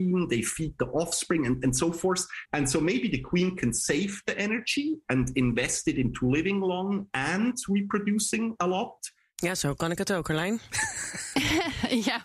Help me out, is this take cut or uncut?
cut